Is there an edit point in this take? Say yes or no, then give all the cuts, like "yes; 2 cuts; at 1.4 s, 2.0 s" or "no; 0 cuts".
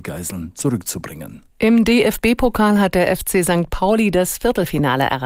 yes; 1 cut; at 1.5 s